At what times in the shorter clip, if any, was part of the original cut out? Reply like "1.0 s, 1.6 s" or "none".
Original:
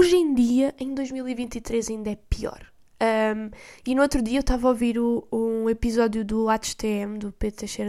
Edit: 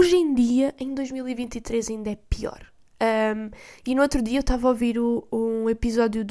none